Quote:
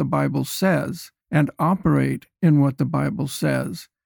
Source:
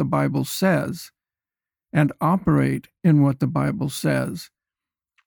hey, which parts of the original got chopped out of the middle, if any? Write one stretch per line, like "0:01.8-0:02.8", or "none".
0:01.2-0:01.8